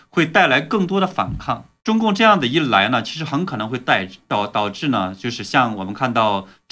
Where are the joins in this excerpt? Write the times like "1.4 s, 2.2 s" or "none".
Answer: 1.8 s